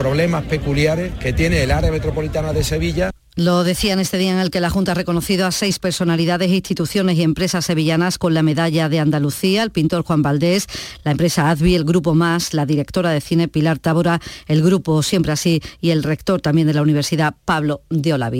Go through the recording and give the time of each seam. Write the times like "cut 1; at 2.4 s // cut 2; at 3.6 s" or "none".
none

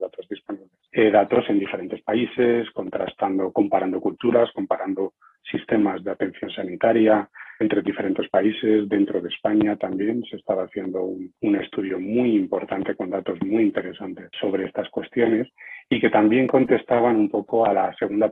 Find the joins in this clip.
cut 1; at 7.6 s // cut 2; at 11.4 s // cut 3; at 14.3 s

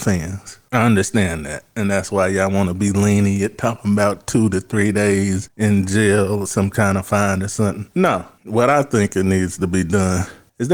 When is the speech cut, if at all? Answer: none

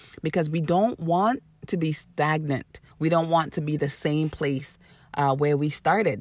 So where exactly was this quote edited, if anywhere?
cut 1; at 2.9 s

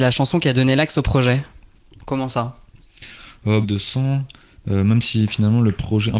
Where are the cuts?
cut 1; at 3.6 s

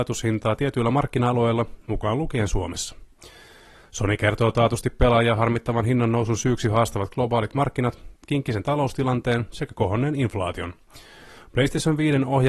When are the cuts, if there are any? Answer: cut 1; at 8.2 s

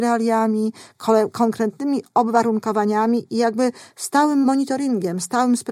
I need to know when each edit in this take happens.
none

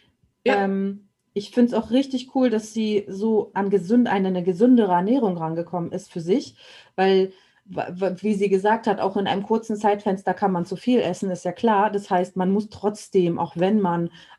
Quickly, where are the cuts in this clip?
cut 1; at 3.5 s

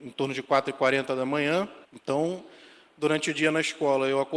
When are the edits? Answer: cut 1; at 1.8 s

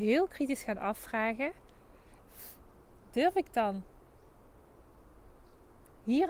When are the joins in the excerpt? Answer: none

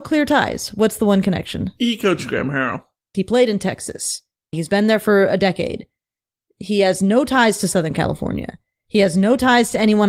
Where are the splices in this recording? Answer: cut 1; at 3.1 s // cut 2; at 4.5 s

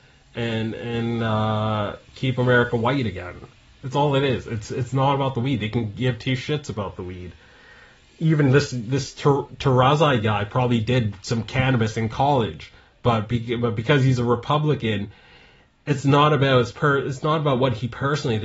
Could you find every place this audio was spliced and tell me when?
cut 1; at 3.7 s

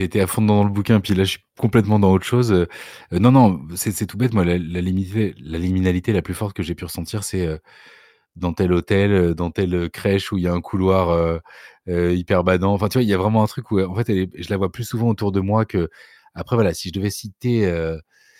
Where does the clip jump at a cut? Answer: none

